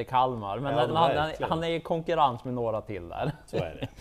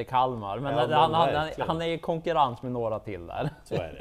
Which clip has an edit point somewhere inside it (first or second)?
first